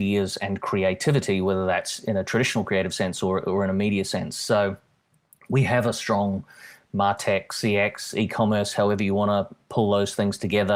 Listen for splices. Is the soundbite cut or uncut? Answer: uncut